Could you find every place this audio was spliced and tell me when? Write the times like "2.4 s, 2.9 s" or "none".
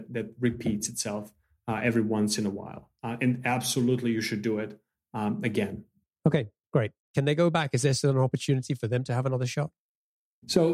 7.1 s